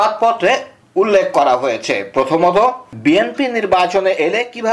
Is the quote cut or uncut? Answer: uncut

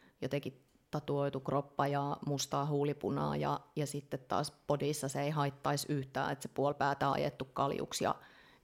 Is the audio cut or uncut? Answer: uncut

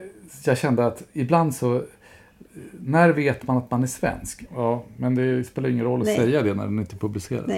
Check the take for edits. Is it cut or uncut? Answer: cut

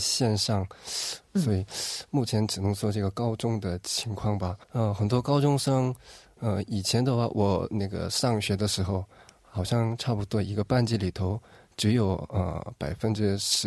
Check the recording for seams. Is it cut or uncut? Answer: cut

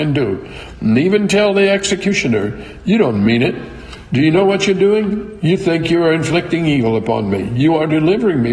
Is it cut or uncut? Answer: uncut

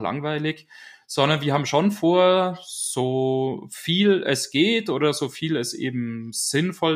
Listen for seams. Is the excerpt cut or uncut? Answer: uncut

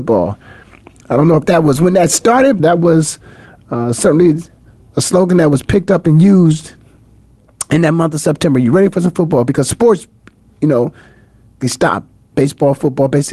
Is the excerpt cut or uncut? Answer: cut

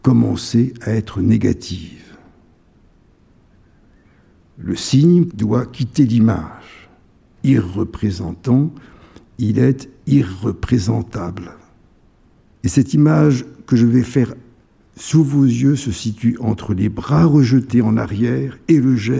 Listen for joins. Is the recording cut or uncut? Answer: cut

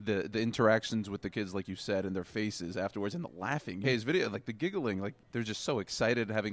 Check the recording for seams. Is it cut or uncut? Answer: cut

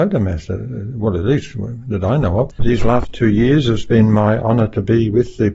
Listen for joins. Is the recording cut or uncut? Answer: cut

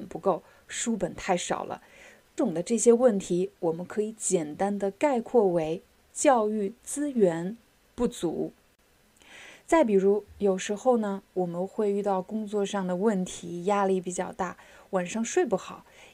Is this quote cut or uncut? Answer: cut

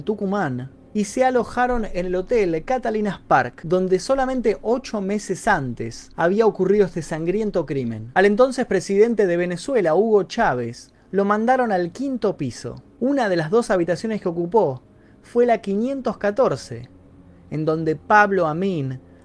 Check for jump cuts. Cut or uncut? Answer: uncut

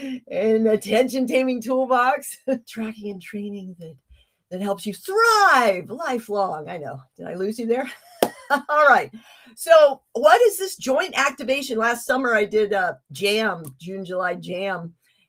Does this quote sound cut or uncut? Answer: cut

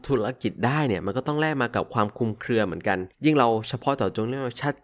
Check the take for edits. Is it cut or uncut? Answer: cut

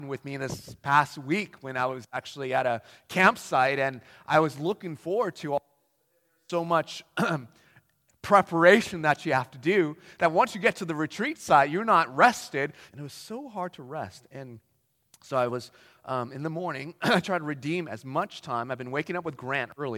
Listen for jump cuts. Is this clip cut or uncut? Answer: cut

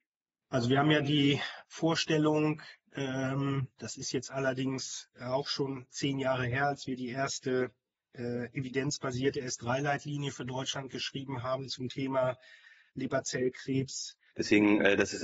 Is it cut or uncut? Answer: cut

